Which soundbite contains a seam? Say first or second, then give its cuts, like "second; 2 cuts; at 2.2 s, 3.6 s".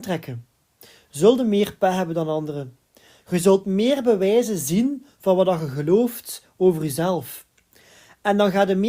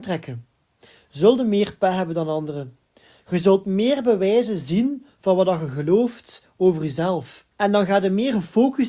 second; 1 cut; at 7.5 s